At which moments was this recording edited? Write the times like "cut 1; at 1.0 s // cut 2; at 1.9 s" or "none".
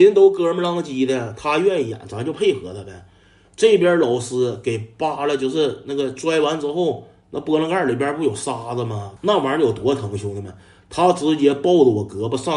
cut 1; at 9.2 s